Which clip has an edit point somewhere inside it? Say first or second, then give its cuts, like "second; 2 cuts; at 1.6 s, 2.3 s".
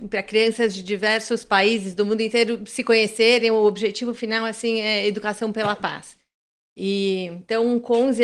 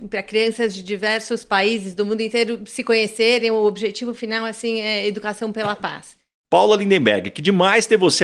second; 1 cut; at 6.4 s